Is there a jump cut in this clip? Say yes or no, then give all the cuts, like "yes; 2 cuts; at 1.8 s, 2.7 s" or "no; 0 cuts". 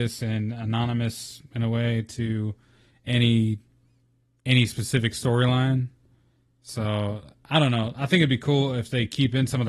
no; 0 cuts